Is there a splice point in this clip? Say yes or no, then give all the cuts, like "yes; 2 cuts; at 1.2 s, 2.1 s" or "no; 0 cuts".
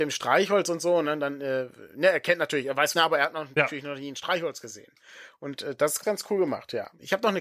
yes; 1 cut; at 2.9 s